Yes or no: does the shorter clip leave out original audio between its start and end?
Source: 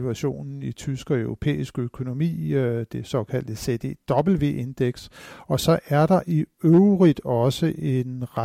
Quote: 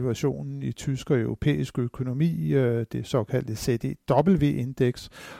no